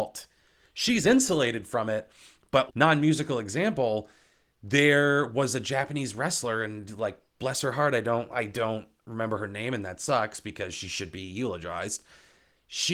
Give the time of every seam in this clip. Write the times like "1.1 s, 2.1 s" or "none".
2.7 s